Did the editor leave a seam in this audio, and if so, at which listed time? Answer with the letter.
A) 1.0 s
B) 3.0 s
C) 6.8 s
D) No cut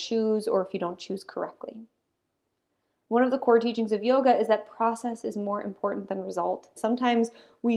C